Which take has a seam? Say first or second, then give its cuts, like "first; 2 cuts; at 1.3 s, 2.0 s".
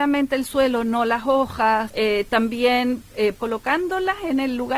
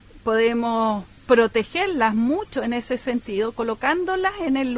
first; 2 cuts; at 1.9 s, 3.4 s